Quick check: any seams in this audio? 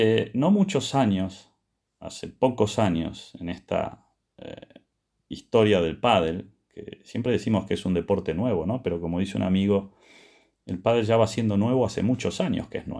no; 0 cuts

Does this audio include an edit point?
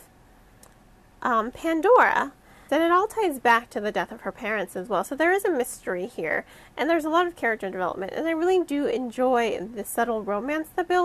yes; 1 cut; at 2.7 s

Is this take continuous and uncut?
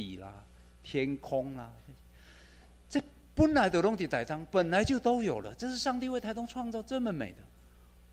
yes; 0 cuts

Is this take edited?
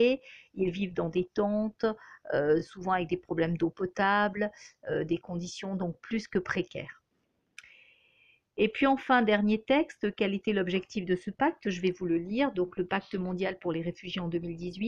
no; 0 cuts

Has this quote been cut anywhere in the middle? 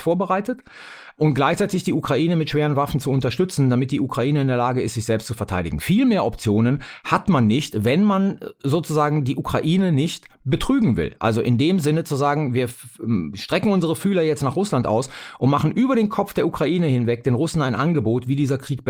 no; 0 cuts

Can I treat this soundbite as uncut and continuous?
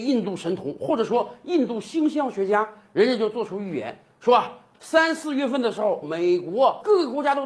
no; 2 cuts; at 4.7 s, 6.0 s

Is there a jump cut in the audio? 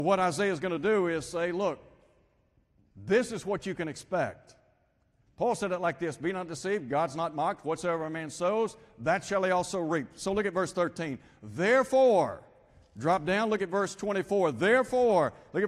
yes; 1 cut; at 2.9 s

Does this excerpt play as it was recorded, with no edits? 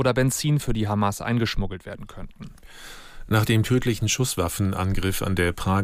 yes; 0 cuts

